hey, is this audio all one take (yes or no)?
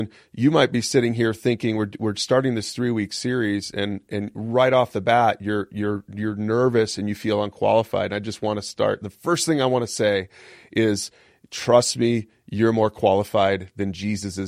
yes